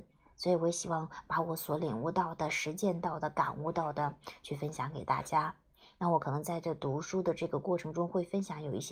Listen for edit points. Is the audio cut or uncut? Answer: uncut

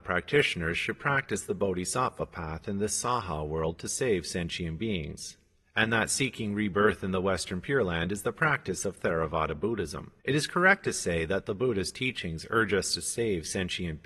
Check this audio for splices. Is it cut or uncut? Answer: cut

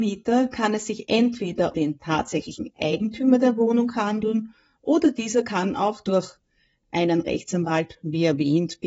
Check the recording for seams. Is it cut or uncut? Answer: cut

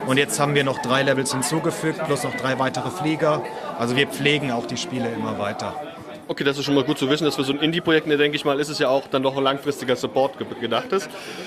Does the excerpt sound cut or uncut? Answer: uncut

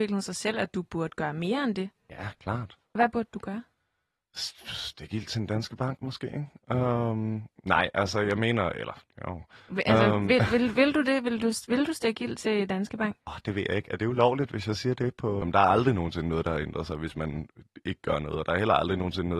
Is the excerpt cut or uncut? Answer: cut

